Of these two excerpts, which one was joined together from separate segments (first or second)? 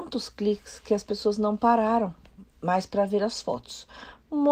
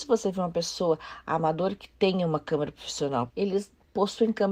second